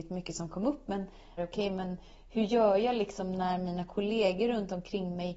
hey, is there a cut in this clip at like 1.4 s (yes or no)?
yes